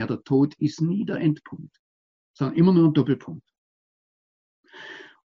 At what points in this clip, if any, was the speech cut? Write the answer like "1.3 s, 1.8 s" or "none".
none